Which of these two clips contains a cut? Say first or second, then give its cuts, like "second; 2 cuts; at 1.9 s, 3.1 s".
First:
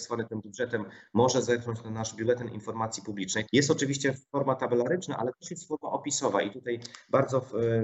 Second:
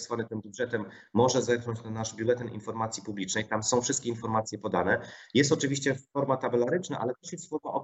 first; 1 cut; at 3.5 s